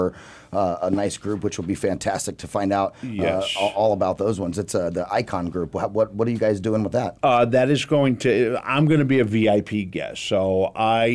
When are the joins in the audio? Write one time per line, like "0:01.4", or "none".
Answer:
none

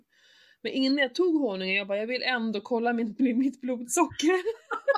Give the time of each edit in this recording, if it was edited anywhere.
none

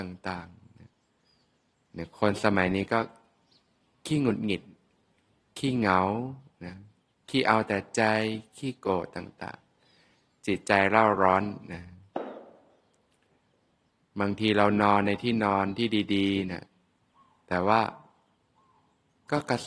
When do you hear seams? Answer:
none

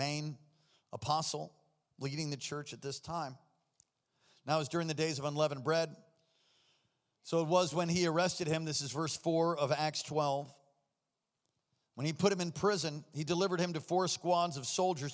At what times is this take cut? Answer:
none

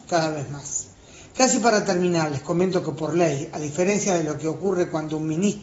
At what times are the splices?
none

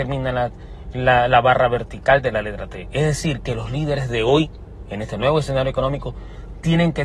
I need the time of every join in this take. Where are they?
none

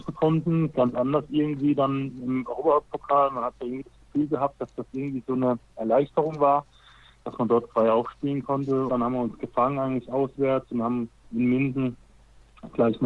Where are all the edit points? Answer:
0:08.9

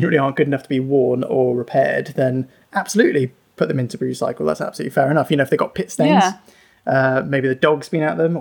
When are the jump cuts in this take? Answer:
none

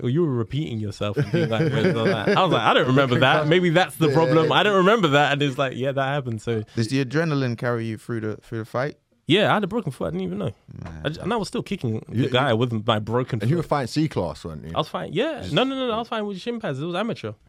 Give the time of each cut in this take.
none

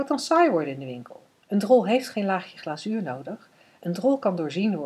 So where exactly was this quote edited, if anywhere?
0:01.4

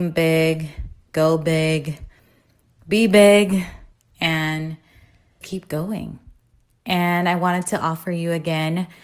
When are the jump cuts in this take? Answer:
0:05.4

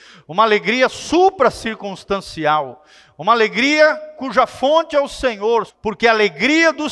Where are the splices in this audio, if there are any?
0:05.7

